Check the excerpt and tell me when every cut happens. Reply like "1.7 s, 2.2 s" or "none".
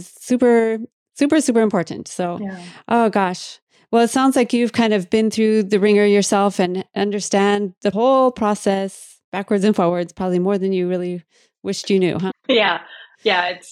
12.3 s